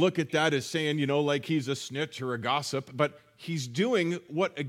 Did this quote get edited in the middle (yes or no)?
no